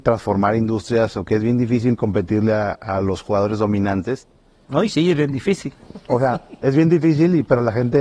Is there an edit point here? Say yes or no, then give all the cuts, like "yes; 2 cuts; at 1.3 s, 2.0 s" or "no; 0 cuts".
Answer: no; 0 cuts